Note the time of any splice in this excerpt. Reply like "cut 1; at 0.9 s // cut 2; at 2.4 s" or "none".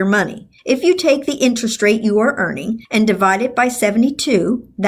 none

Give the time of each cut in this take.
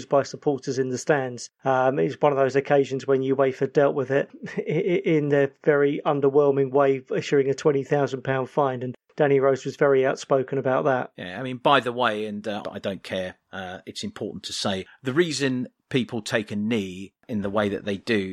cut 1; at 12.6 s

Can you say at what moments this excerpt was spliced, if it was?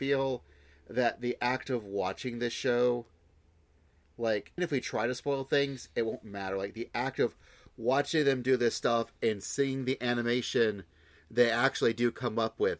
cut 1; at 4.6 s

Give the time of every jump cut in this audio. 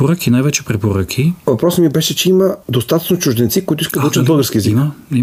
cut 1; at 2.6 s

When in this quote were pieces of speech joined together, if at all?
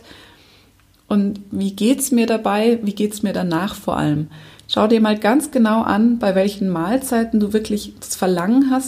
none

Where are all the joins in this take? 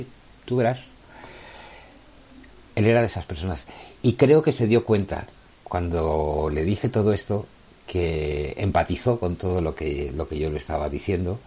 cut 1; at 2.7 s

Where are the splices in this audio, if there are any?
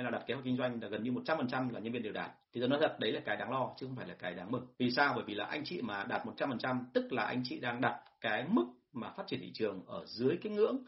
cut 1; at 2.4 s // cut 2; at 4.7 s

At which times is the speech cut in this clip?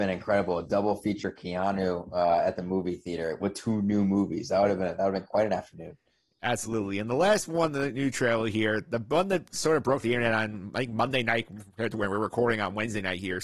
none

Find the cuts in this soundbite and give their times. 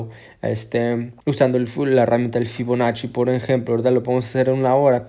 cut 1; at 1.2 s

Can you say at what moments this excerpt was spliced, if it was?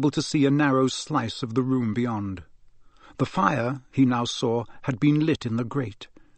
none

